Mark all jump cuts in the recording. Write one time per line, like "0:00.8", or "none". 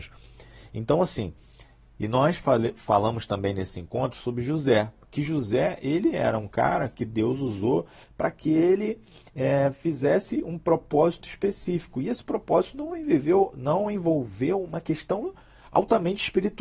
0:11.2